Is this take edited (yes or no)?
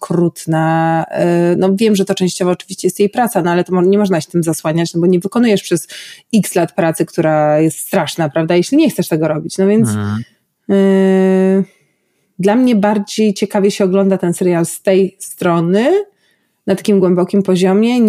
no